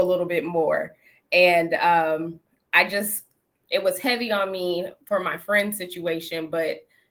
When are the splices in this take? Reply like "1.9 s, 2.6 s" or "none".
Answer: none